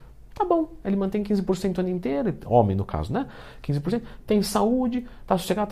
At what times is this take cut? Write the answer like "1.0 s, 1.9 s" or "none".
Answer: none